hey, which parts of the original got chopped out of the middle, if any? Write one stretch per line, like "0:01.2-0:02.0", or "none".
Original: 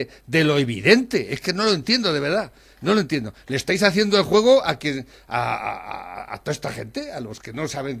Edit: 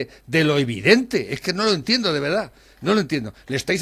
none